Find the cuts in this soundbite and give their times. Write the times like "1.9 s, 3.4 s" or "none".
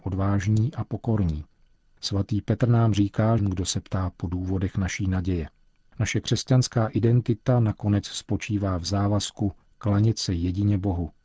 3.4 s